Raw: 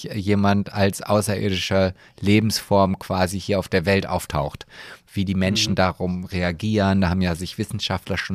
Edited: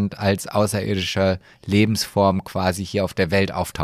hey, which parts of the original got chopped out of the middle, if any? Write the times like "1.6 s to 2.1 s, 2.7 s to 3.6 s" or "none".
none